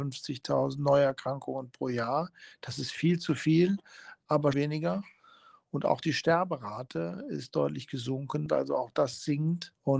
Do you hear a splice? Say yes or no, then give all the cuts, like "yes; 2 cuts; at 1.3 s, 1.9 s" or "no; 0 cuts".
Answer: yes; 2 cuts; at 4.5 s, 8.5 s